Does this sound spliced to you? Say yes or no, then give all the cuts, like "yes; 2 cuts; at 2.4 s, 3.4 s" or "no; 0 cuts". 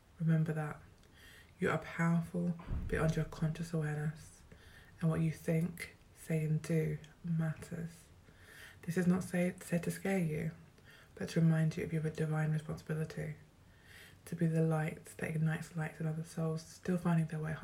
no; 0 cuts